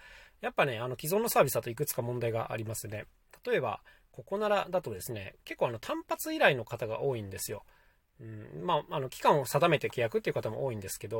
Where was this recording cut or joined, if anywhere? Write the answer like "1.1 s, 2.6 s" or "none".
none